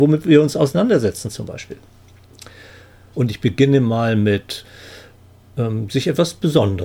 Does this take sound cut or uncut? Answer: cut